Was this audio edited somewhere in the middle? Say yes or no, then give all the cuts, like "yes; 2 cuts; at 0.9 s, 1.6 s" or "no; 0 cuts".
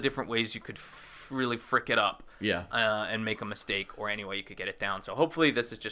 no; 0 cuts